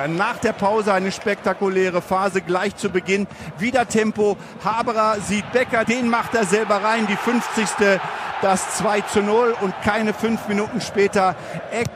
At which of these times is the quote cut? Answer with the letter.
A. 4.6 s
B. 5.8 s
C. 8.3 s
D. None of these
B